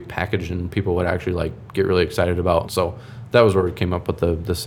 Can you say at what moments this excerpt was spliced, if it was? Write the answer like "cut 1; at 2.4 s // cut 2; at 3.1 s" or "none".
cut 1; at 2.6 s